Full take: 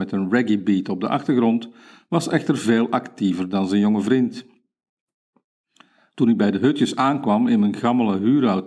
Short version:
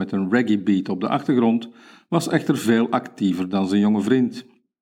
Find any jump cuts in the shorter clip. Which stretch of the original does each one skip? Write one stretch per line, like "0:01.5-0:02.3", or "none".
none